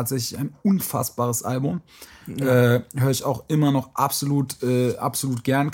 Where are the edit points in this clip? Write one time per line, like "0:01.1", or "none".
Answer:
none

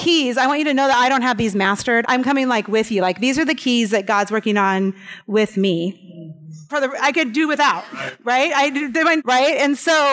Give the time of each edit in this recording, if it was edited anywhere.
0:02.0
0:06.7
0:09.2

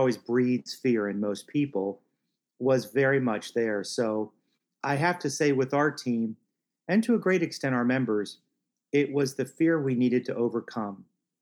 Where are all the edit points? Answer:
none

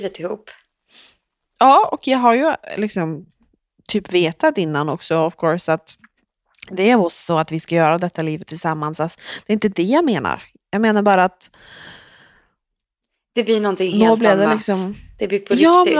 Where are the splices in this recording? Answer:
none

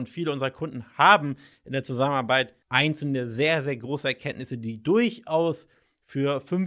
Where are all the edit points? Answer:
0:02.6

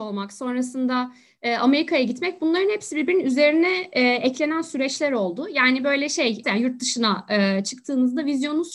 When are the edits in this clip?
0:06.4

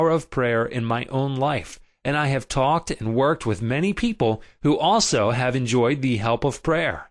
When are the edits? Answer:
none

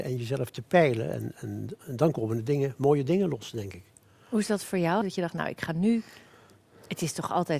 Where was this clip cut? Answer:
0:05.0

